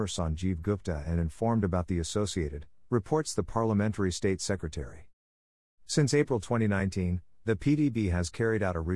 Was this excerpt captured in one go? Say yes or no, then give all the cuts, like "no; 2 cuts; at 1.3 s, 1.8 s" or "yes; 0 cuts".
no; 2 cuts; at 2.8 s, 5.6 s